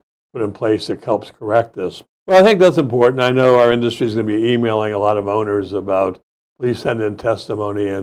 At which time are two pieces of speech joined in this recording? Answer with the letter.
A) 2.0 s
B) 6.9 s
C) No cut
A